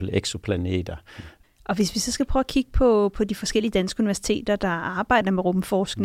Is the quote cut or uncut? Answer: cut